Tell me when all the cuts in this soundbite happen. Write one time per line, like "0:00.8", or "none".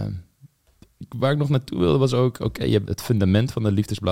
0:02.8